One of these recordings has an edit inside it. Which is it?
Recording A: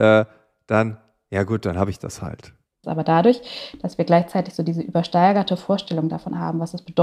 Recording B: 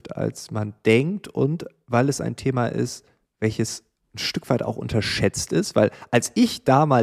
A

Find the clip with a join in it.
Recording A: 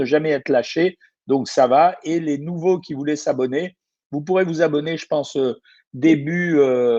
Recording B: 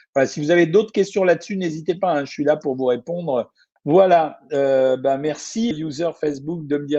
B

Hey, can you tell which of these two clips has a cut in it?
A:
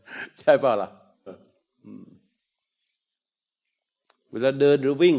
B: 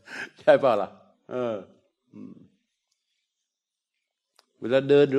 A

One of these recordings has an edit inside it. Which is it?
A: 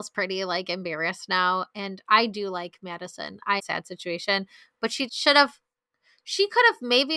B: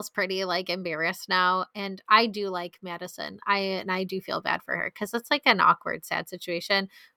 A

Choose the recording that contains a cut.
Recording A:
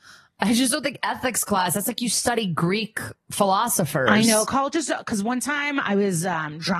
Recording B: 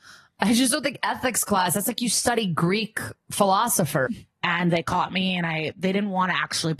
B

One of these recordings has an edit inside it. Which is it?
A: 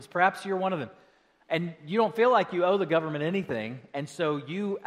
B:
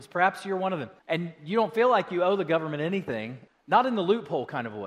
B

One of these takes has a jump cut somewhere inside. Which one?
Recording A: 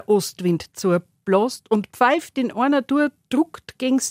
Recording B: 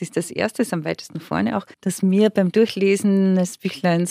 B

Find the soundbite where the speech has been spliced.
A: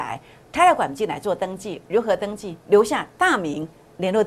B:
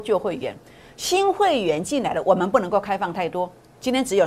A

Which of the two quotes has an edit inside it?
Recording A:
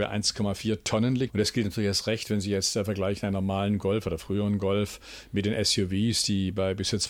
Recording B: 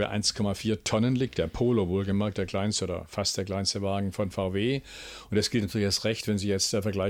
A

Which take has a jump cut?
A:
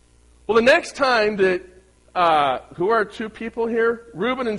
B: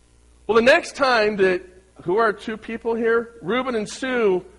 B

